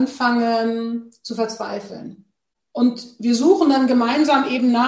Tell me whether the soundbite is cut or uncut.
uncut